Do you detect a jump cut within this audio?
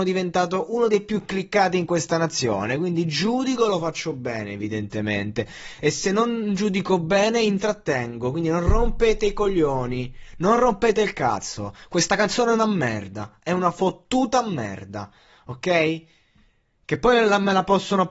no; 0 cuts

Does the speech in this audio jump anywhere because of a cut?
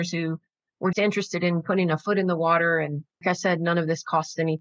yes; 2 cuts; at 0.9 s, 3.2 s

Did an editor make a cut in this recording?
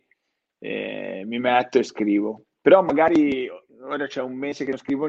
no; 0 cuts

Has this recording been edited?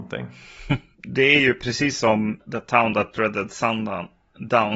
yes; 1 cut; at 0.9 s

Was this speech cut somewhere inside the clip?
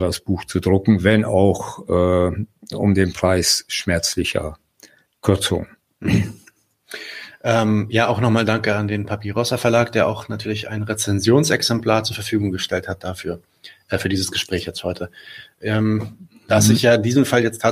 no; 0 cuts

